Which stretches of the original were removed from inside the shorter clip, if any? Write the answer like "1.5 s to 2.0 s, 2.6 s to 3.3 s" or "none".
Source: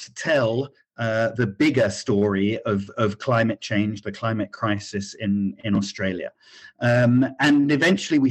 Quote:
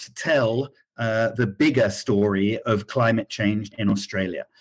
2.6 s to 2.9 s, 4.0 s to 5.6 s